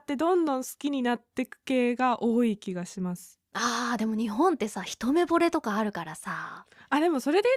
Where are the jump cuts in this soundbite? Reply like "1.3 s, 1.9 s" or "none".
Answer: 3.5 s